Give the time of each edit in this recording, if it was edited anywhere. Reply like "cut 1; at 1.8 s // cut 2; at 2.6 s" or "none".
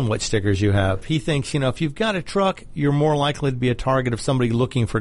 cut 1; at 1.0 s